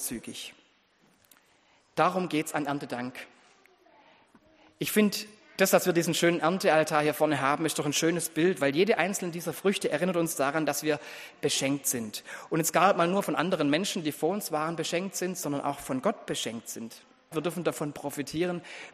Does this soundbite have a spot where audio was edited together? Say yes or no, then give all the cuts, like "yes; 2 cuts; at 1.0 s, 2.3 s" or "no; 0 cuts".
yes; 1 cut; at 17.3 s